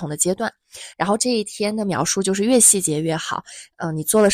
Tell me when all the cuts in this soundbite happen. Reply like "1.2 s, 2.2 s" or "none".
none